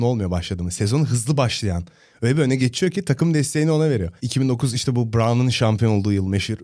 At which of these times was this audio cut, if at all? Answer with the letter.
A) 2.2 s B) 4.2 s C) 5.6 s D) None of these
B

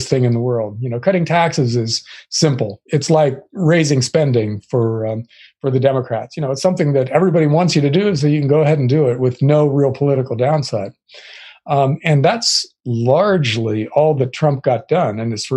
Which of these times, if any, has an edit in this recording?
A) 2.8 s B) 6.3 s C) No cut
C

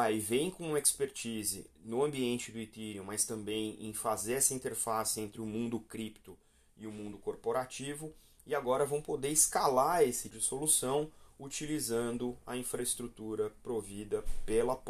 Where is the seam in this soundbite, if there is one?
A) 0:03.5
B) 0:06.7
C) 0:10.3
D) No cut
C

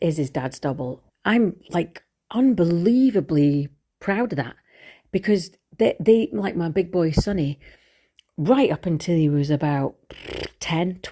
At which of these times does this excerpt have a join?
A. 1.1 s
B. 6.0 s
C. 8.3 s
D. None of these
A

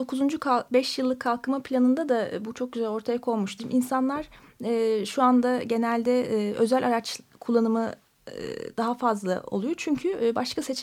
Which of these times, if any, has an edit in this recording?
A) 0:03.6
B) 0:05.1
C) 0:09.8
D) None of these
A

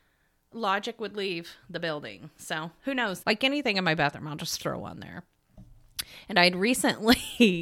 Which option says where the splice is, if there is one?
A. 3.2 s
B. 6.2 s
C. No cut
A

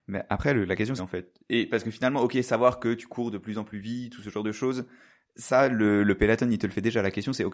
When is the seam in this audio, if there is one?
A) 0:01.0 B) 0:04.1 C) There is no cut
A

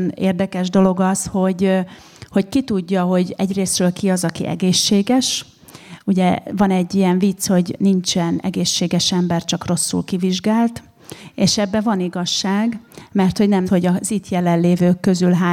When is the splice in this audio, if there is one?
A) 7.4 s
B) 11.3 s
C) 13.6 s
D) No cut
C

